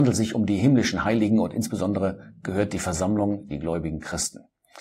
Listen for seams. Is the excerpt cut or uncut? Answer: cut